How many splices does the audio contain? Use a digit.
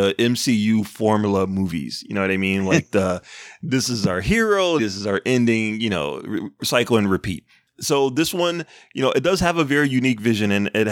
1